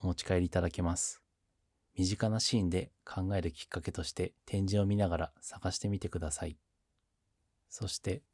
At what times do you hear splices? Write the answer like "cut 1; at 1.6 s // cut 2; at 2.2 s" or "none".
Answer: cut 1; at 1.9 s // cut 2; at 4.4 s